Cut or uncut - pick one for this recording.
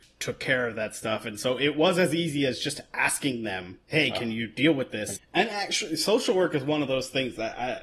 cut